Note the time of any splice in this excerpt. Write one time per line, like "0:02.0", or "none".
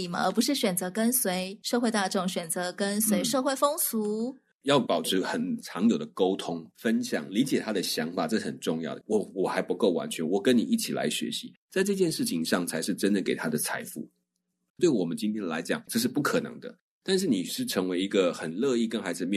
0:09.0
0:14.7
0:15.9